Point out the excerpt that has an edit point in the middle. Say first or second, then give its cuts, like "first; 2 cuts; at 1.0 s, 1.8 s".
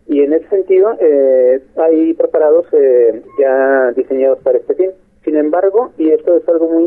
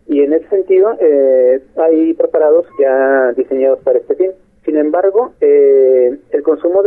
second; 2 cuts; at 2.7 s, 5.3 s